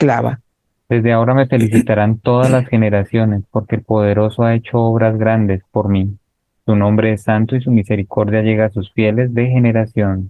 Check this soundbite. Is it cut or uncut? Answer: uncut